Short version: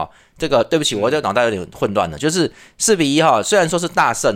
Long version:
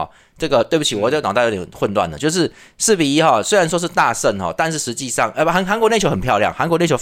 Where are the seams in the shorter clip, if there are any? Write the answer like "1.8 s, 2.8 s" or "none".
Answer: none